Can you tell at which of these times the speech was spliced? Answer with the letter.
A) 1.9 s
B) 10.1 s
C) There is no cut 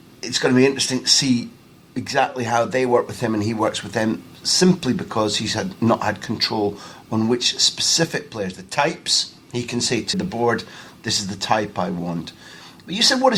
B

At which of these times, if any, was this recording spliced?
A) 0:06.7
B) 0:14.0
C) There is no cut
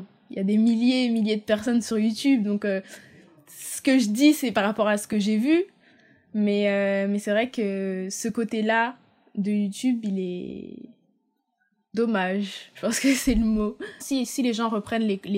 B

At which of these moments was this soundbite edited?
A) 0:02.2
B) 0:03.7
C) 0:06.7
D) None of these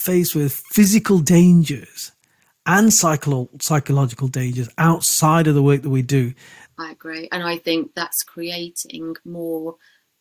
C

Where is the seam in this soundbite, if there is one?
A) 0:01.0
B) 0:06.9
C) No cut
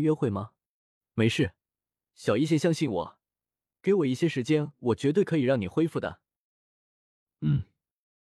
A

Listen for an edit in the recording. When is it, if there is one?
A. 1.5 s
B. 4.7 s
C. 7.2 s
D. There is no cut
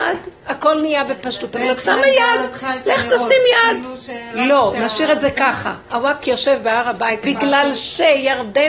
C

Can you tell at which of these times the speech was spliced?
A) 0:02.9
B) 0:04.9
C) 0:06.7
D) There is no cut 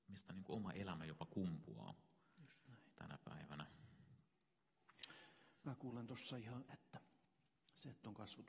C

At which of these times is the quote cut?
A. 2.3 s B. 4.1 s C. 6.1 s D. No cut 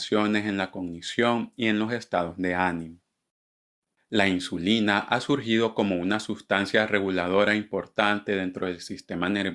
D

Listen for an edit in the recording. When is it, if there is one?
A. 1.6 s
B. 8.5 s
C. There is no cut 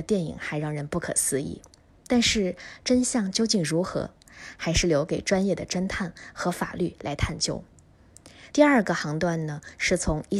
B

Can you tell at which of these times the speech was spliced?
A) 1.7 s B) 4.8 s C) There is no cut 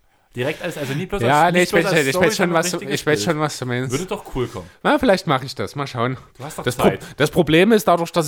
C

